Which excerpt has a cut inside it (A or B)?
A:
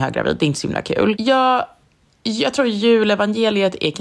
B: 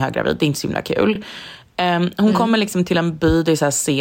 A